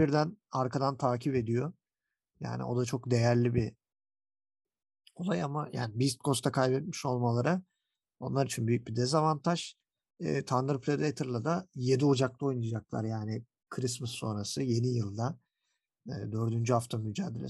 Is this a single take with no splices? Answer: yes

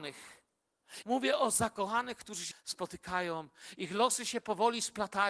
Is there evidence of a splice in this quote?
yes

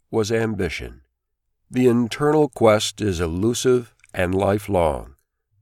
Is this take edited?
yes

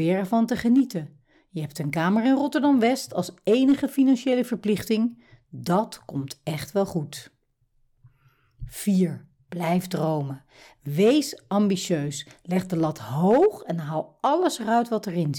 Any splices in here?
no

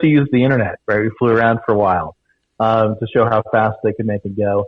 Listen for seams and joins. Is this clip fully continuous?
yes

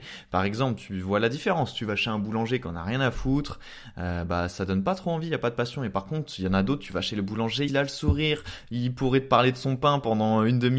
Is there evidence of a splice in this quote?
yes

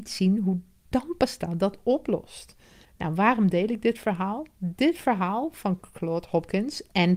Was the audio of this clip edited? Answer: yes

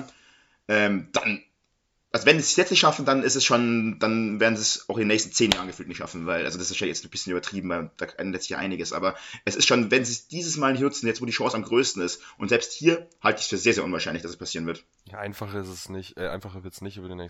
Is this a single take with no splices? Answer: yes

